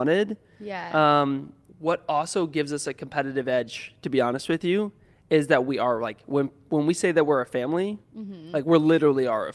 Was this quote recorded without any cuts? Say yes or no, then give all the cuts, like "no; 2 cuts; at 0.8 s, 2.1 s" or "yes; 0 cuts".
no; 1 cut; at 1.7 s